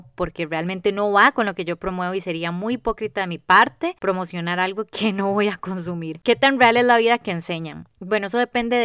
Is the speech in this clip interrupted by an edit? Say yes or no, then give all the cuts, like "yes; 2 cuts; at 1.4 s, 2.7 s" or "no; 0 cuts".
no; 0 cuts